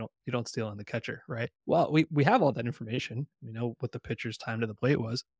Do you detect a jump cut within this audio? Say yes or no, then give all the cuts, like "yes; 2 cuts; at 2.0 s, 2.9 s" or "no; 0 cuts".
yes; 2 cuts; at 1.6 s, 3.3 s